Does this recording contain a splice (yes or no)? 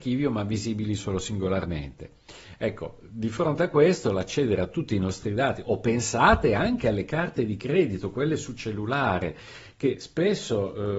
no